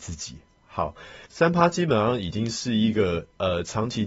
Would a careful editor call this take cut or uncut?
cut